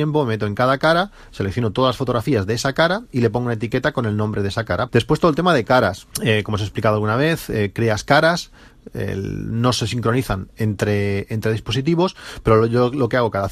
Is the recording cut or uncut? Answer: cut